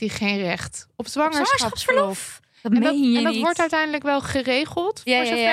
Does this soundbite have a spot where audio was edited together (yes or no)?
no